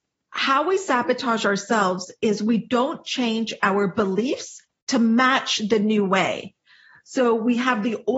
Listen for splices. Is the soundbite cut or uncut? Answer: uncut